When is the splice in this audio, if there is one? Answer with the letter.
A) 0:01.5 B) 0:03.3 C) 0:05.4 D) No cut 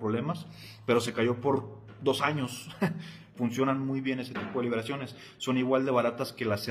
B